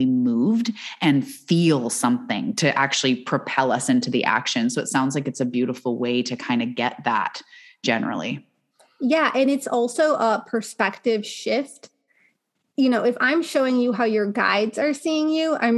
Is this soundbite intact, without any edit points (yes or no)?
yes